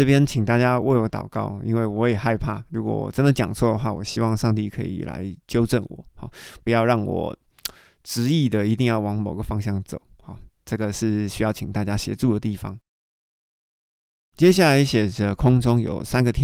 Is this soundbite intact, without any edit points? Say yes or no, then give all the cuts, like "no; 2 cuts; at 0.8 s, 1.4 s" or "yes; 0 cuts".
yes; 0 cuts